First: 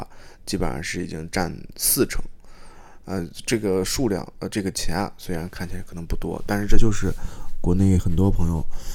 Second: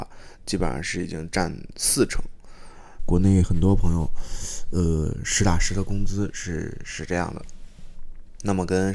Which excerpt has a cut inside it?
second; 1 cut; at 3.0 s

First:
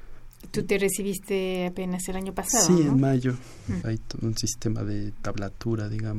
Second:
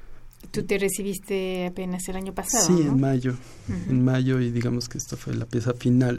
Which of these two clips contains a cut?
first; 1 cut; at 3.8 s

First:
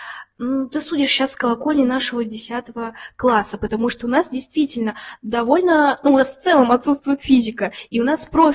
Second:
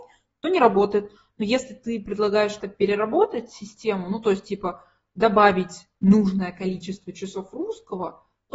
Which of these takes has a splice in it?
second; 1 cut; at 2.6 s

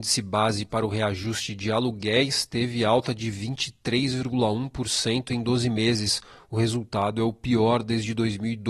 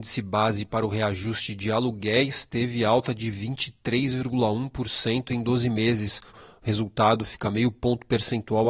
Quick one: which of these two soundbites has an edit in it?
second; 1 cut; at 6.3 s

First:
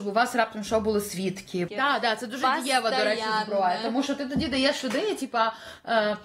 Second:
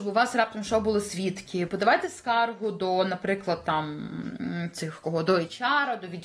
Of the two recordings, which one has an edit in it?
first; 1 cut; at 1.7 s

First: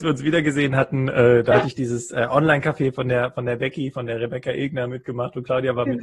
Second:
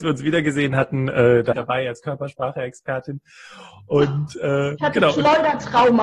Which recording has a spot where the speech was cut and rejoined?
second; 1 cut; at 1.5 s

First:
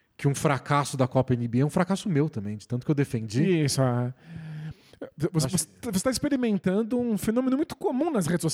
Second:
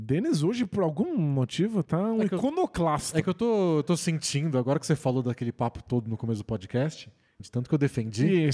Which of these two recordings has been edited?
second; 1 cut; at 7.4 s

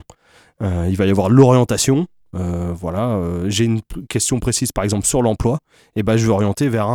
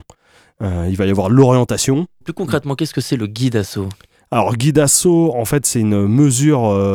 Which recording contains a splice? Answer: second; 1 cut; at 2.2 s

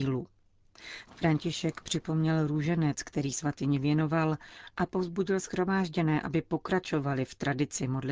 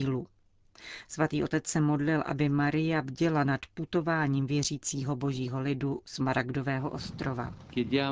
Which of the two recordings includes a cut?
first; 1 cut; at 1.1 s

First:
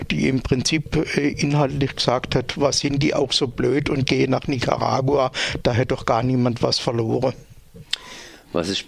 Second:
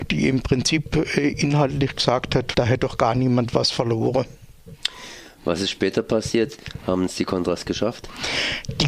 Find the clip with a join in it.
second; 1 cut; at 2.5 s

